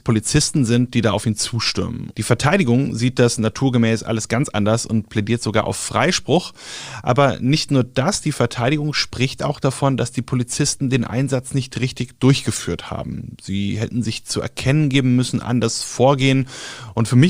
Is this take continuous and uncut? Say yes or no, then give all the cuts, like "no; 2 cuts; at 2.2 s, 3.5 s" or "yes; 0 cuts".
no; 1 cut; at 2.1 s